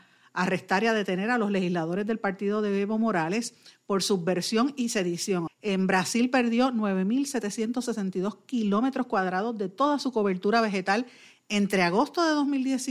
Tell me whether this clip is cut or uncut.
cut